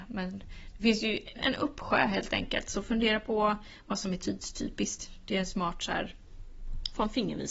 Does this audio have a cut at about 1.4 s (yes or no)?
yes